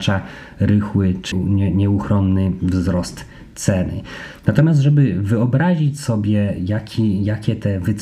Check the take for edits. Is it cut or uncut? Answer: cut